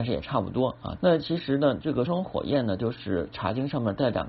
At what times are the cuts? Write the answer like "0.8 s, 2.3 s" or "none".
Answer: 1.0 s, 2.1 s